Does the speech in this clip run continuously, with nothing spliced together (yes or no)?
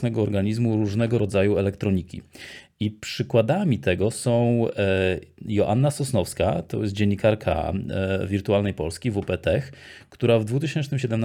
yes